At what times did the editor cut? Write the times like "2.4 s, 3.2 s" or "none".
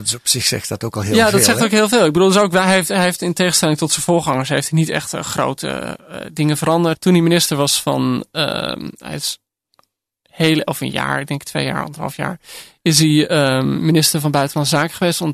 6.9 s

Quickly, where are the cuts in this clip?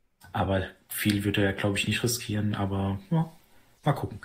none

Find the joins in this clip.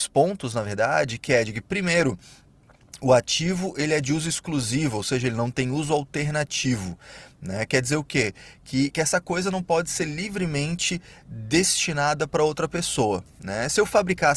none

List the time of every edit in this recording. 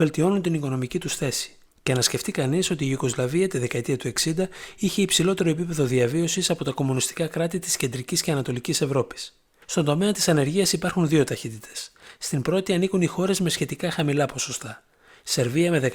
1.7 s

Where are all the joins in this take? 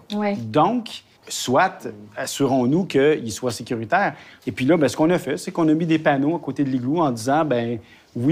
1.2 s

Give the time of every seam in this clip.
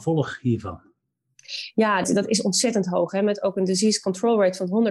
2.0 s

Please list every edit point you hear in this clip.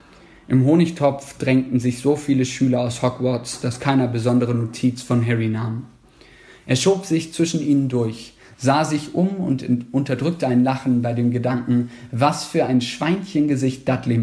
none

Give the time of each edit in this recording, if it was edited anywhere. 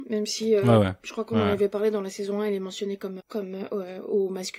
3.2 s

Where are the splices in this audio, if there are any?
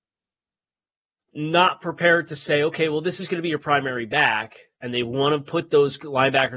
4.7 s

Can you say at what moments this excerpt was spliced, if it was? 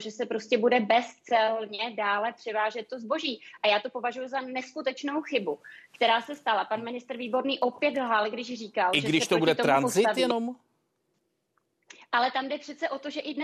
none

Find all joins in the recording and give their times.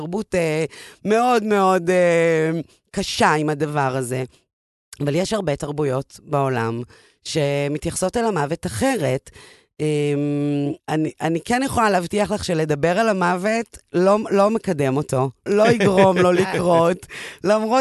10.8 s, 15.5 s

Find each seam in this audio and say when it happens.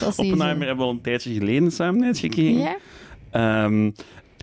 none

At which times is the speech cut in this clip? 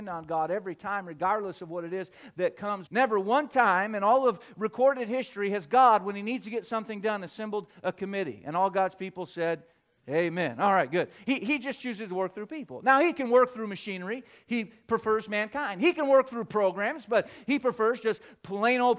2.9 s

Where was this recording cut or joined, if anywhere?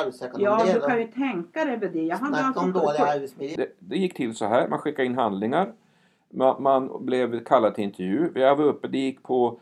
3.6 s

